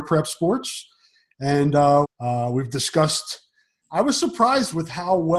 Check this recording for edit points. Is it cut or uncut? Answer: cut